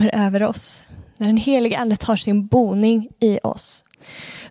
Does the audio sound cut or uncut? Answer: uncut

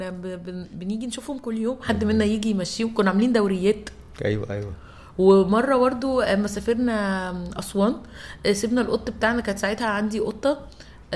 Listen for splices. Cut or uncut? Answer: uncut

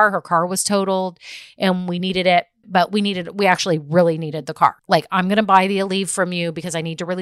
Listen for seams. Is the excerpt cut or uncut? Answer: cut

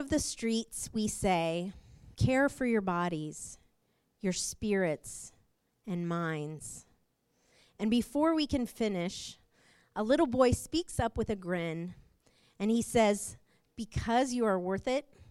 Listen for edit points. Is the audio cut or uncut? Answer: cut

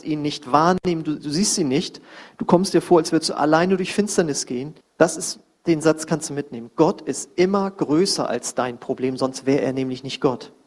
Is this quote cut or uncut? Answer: cut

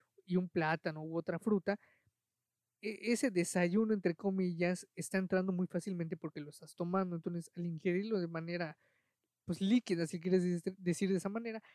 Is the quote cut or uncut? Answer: uncut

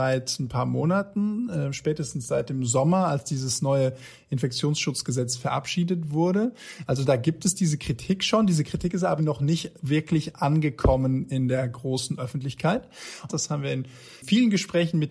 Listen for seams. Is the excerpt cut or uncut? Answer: cut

